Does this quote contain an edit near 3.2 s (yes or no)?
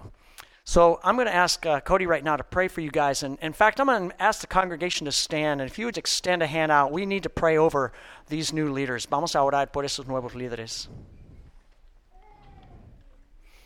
no